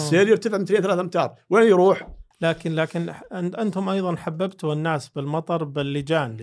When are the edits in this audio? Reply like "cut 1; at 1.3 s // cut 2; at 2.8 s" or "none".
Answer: cut 1; at 2.3 s

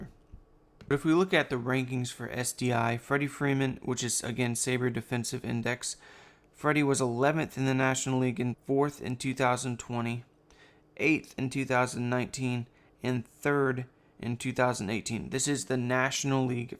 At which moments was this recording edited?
cut 1; at 8.5 s

